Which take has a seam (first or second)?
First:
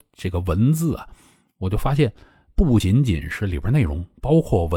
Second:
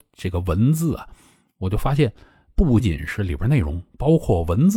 second